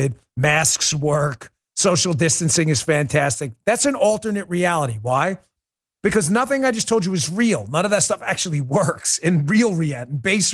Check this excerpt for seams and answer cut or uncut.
uncut